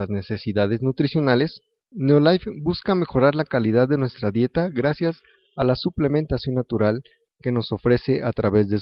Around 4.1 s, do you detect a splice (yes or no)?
no